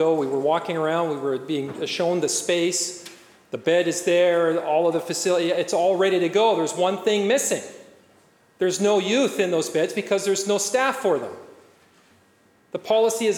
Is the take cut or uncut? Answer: uncut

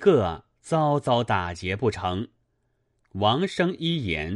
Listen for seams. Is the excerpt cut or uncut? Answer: cut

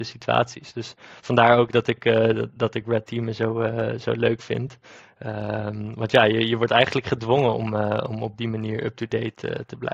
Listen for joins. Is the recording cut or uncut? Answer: uncut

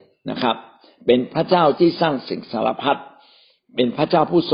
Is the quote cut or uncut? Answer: uncut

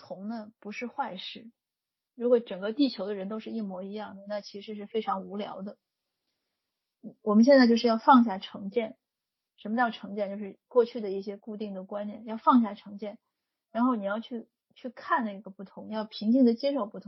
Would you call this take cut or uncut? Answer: uncut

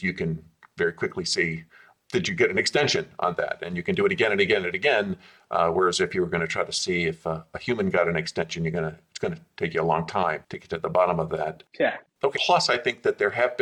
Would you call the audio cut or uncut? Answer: cut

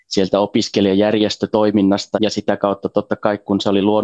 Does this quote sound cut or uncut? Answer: cut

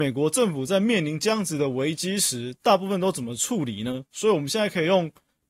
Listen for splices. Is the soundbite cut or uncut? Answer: uncut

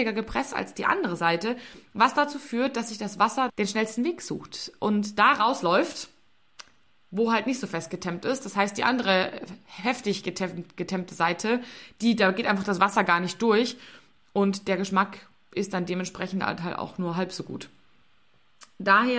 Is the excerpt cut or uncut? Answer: cut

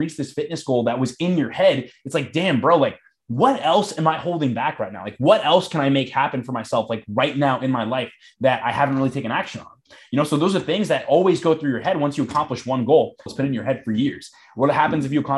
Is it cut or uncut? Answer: cut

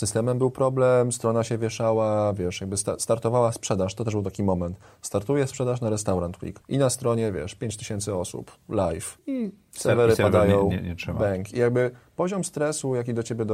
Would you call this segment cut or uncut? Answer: uncut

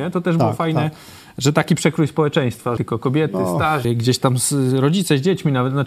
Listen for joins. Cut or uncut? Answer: cut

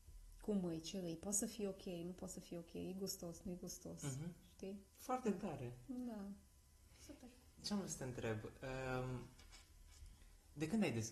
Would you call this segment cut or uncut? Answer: cut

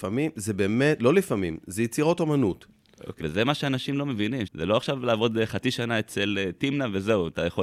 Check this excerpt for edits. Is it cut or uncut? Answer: cut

